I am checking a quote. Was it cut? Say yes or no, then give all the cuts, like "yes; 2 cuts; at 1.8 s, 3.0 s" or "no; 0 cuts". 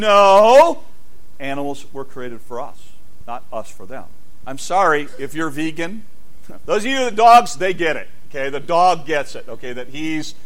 yes; 3 cuts; at 3.2 s, 4.4 s, 6.6 s